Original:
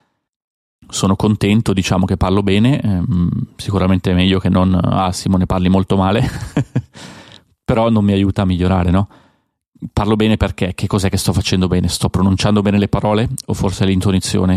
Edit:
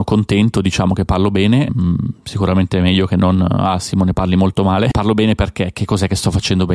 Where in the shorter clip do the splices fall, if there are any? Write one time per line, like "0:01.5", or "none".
0:01.7
0:04.9